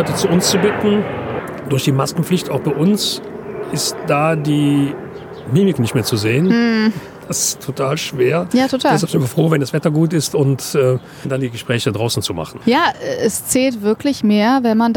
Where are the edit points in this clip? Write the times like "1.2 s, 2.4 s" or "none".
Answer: none

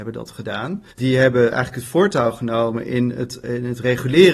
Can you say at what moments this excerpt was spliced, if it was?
0.9 s

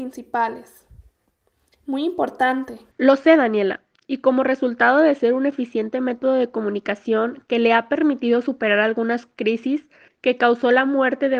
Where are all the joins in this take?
2.9 s, 10.1 s

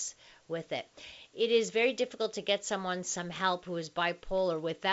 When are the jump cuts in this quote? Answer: none

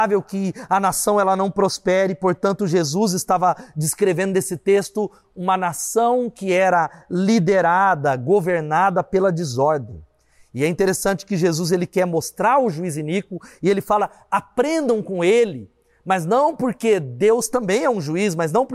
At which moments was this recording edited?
none

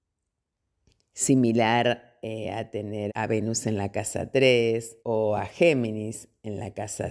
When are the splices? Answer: 3.1 s, 5.0 s

